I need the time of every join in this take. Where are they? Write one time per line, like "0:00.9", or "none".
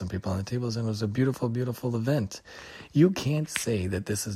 none